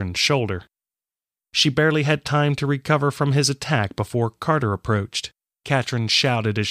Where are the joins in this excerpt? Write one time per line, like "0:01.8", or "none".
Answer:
0:05.5